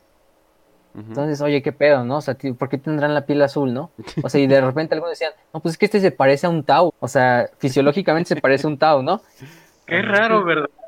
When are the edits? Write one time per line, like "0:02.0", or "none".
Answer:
0:06.9